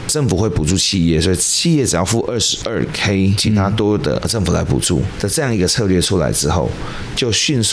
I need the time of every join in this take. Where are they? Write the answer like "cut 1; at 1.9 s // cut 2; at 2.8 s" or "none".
cut 1; at 3.4 s